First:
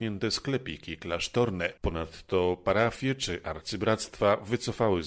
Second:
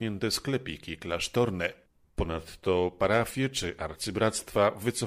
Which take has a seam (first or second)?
first